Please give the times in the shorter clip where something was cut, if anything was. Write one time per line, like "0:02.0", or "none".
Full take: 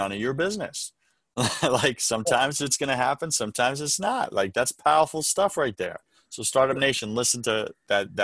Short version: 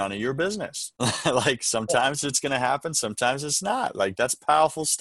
0:01.0